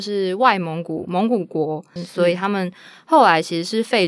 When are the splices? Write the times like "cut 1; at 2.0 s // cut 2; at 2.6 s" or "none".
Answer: cut 1; at 2.0 s